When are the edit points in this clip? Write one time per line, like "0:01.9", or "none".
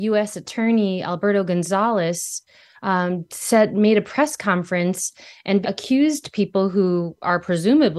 0:05.6